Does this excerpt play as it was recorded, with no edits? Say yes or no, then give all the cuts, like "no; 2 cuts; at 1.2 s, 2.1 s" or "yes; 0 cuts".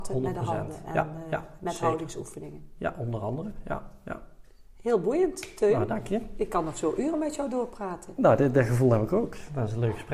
yes; 0 cuts